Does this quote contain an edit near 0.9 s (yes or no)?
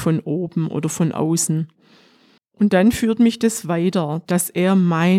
no